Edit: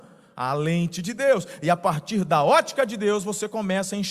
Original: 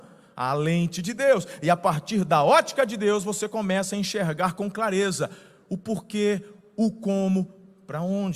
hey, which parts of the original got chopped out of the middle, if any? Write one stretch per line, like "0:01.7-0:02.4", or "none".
none